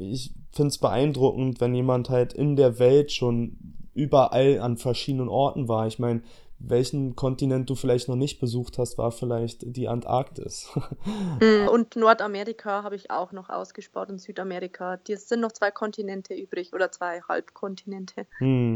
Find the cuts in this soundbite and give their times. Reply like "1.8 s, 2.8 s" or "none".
11.7 s